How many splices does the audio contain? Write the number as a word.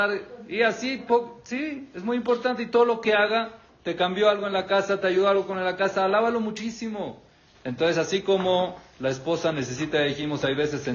one